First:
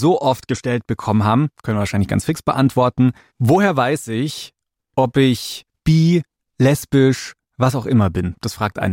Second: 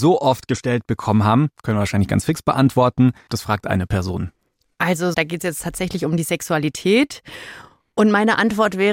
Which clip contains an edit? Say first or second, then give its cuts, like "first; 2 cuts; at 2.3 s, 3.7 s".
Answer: second; 2 cuts; at 3.3 s, 5.1 s